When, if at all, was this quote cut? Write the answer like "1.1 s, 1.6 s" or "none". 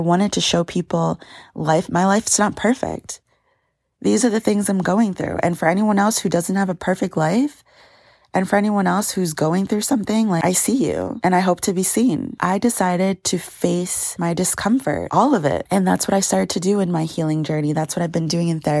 none